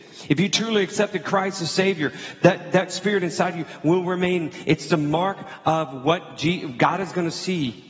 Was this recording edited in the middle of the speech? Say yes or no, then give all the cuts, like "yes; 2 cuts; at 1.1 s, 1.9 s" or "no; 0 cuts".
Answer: no; 0 cuts